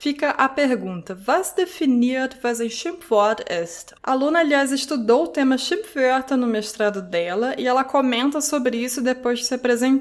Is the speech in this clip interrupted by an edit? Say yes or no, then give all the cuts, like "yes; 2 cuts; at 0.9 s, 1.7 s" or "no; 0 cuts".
yes; 1 cut; at 4.0 s